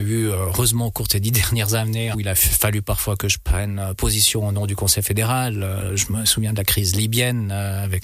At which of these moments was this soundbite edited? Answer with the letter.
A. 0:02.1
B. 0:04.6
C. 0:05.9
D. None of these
A